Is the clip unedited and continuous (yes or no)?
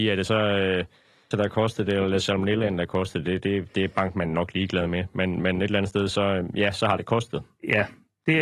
no